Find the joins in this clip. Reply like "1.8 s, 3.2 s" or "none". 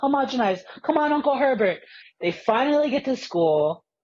2.0 s